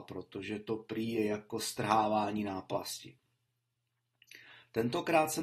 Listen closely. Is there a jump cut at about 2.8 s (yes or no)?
no